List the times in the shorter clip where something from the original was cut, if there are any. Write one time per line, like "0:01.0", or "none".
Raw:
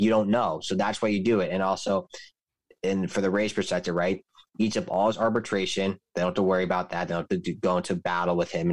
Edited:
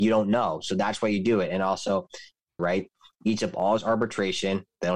0:02.6